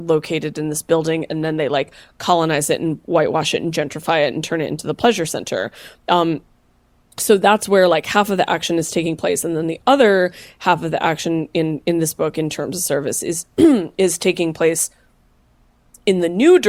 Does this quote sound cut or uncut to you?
uncut